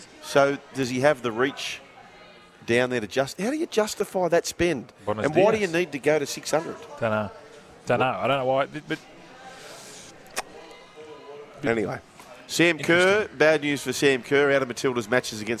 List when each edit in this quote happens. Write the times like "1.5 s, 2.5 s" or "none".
none